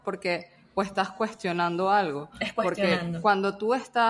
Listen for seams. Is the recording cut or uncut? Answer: uncut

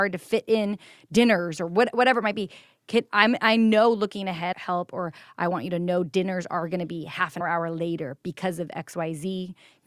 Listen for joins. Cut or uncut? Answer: cut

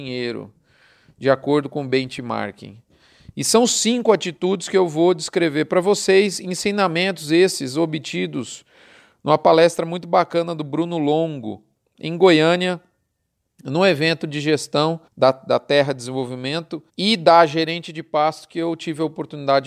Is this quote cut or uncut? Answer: cut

